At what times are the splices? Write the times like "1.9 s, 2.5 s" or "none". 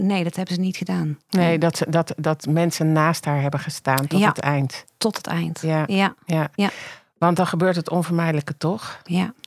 none